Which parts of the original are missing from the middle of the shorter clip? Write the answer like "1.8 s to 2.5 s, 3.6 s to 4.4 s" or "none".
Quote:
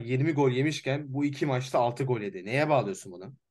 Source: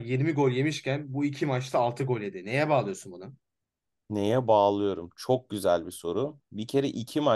none